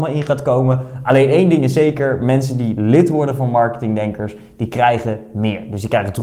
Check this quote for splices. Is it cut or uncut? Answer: uncut